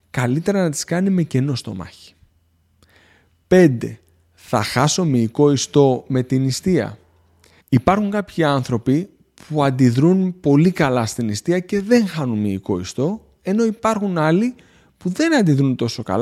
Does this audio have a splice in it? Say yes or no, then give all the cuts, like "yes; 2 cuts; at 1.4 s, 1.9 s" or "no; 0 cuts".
yes; 1 cut; at 7.6 s